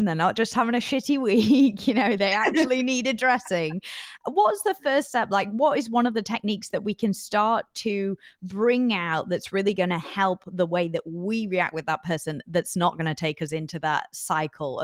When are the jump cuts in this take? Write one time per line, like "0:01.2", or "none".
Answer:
none